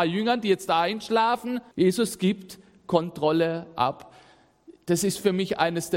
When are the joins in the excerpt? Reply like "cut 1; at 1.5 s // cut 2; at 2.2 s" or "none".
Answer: cut 1; at 1.7 s